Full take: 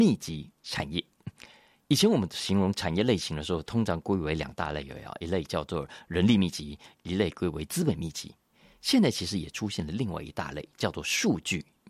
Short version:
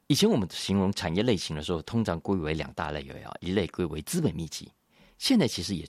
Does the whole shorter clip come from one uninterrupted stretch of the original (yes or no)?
no